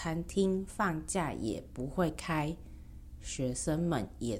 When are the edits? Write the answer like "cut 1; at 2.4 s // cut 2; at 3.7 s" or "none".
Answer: none